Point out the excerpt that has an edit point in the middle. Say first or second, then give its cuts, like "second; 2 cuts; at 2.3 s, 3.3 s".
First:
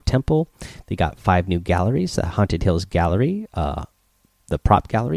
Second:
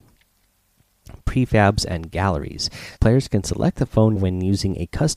second; 2 cuts; at 3.0 s, 4.2 s